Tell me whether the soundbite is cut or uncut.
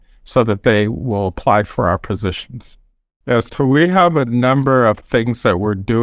cut